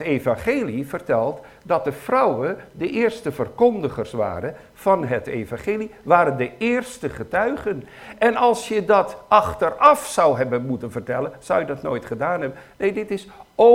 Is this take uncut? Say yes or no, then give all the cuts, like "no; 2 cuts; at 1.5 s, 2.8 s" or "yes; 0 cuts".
yes; 0 cuts